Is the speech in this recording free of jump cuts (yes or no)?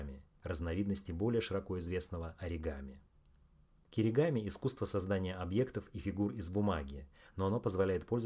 yes